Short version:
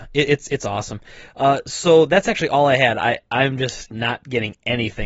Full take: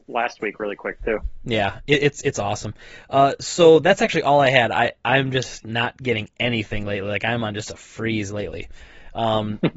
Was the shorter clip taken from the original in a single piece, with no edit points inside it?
yes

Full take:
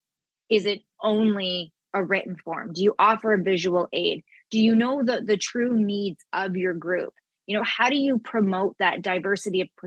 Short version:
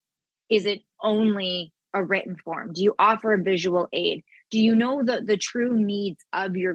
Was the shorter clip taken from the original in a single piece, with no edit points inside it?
yes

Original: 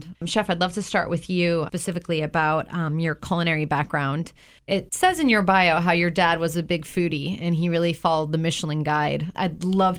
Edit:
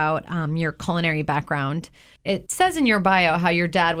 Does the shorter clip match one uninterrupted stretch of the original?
yes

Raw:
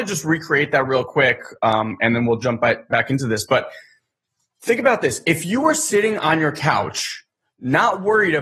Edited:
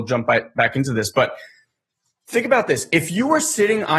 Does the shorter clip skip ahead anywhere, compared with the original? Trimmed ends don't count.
no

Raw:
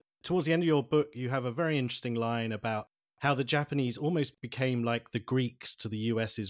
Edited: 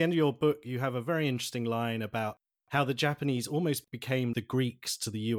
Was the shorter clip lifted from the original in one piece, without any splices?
no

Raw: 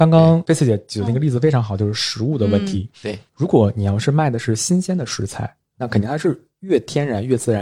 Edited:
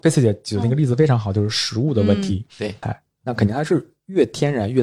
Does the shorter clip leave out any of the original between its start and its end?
yes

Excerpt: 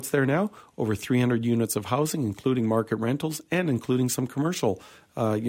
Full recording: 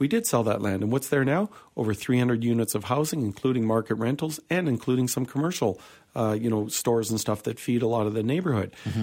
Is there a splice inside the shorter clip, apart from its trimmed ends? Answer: no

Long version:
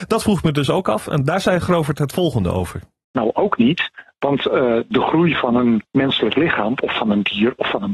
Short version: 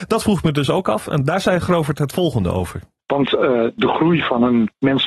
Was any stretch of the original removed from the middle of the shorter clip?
yes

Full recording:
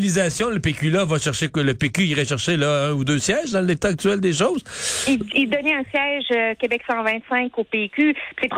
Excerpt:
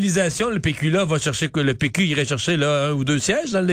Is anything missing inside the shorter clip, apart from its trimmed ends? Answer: no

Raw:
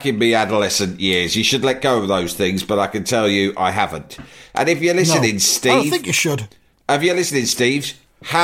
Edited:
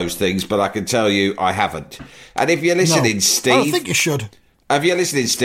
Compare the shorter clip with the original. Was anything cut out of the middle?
no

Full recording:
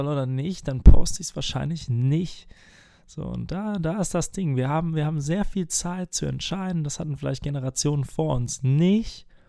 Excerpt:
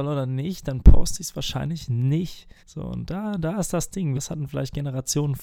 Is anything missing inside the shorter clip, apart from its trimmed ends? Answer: yes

